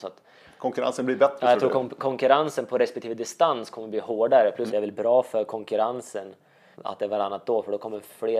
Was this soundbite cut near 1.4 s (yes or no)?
no